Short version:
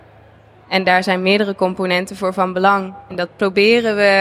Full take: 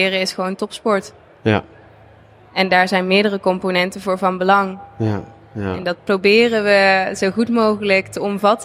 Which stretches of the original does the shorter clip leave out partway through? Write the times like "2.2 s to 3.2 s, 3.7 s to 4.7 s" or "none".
4.9 s to 5.8 s